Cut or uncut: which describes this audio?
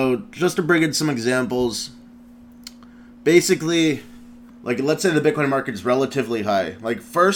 cut